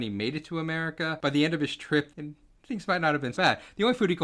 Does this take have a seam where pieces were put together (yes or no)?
yes